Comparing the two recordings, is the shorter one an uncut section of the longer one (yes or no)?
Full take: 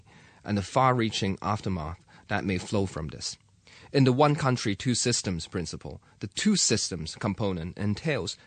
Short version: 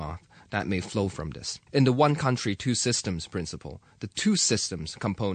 no